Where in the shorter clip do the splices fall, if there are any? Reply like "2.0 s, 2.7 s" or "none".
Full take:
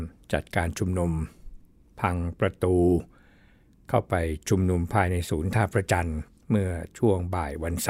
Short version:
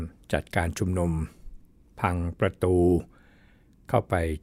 none